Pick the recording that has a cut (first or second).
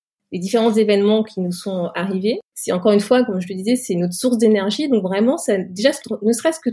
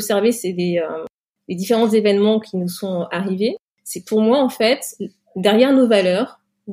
first